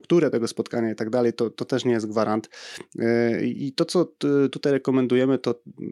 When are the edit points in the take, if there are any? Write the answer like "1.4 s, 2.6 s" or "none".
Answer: none